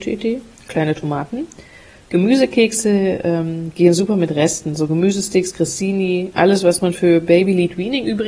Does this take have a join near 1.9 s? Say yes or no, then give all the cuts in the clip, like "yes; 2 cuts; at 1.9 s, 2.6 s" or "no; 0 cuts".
no; 0 cuts